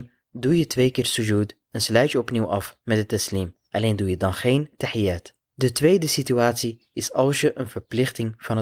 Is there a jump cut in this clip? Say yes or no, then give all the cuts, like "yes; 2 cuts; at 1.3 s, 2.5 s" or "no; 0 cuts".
no; 0 cuts